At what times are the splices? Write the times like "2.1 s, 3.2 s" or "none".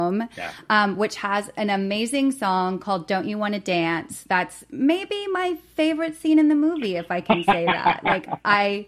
none